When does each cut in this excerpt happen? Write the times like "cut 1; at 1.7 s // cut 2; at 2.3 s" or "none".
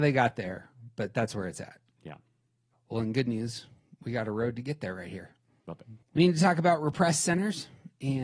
cut 1; at 6.0 s